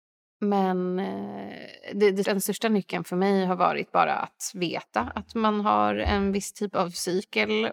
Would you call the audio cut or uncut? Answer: cut